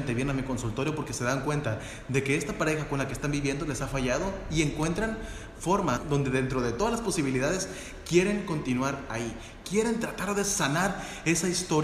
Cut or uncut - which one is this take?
cut